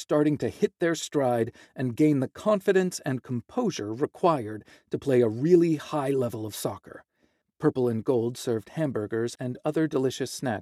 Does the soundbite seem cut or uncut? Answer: cut